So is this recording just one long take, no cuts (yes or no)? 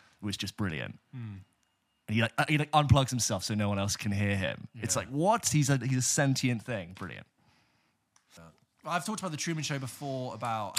yes